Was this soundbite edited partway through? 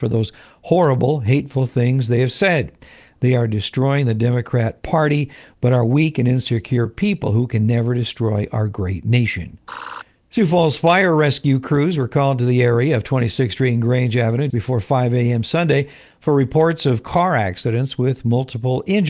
yes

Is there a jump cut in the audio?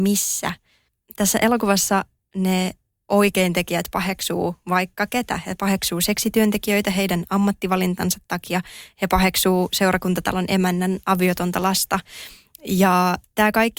no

